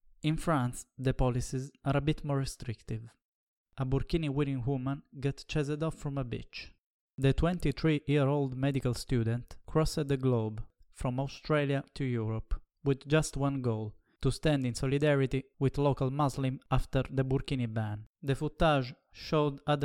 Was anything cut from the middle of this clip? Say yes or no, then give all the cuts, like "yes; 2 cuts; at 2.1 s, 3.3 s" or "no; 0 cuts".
yes; 1 cut; at 18.1 s